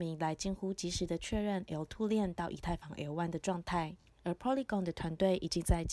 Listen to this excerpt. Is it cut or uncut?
uncut